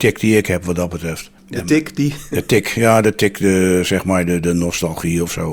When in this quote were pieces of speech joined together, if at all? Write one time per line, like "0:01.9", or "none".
0:01.4